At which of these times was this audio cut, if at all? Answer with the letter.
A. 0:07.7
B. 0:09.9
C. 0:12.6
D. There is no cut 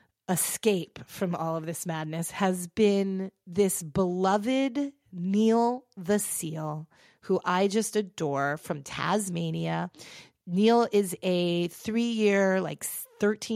D